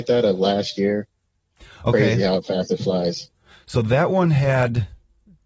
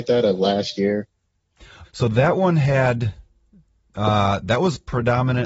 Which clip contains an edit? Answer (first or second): second